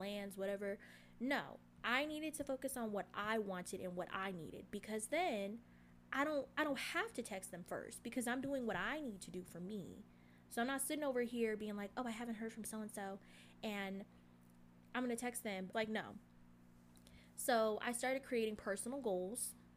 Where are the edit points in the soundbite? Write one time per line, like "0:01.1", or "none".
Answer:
0:15.7